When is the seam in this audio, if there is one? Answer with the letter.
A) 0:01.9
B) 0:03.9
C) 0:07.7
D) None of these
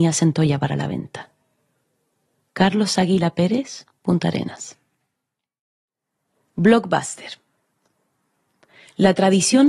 B